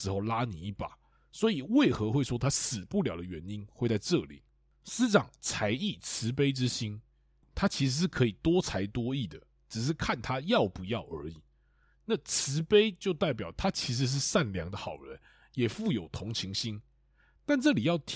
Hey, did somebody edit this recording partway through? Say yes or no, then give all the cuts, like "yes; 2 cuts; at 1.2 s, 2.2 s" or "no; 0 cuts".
yes; 1 cut; at 7.4 s